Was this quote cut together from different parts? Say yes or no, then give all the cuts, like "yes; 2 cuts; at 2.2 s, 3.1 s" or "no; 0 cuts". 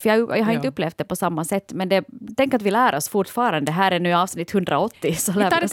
no; 0 cuts